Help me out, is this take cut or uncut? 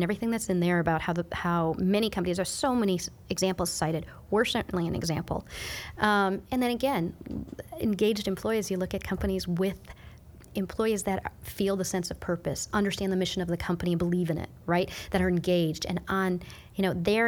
uncut